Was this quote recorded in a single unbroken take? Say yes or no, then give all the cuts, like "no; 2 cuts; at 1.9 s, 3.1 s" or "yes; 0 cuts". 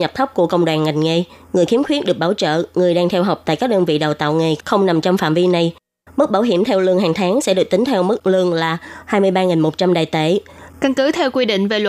no; 2 cuts; at 6.0 s, 10.7 s